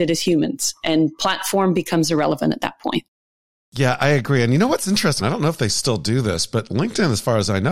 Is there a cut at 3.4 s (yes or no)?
no